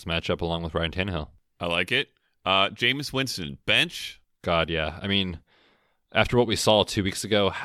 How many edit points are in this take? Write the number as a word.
zero